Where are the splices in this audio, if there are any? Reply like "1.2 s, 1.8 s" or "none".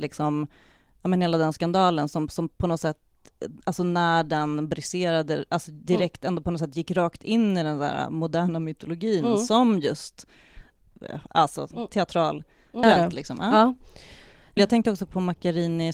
12.8 s, 14.6 s

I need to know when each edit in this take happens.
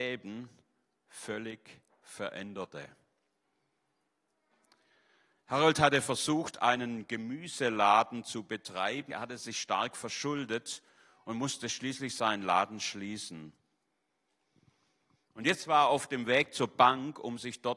9.1 s

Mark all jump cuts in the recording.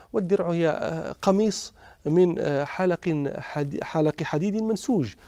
none

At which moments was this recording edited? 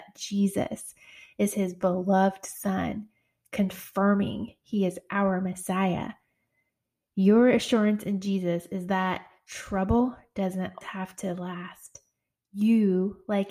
10.8 s

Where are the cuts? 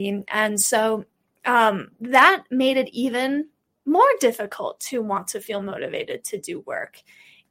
none

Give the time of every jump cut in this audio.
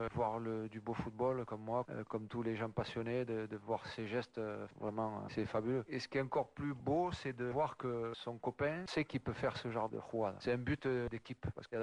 8.9 s, 9.9 s

